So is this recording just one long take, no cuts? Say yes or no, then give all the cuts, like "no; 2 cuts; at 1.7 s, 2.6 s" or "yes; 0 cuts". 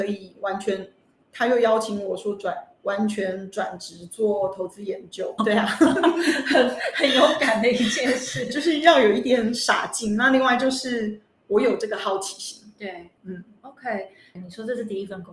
no; 2 cuts; at 5.4 s, 14.4 s